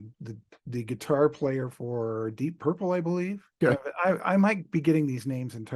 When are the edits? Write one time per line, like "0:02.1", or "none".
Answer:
0:03.6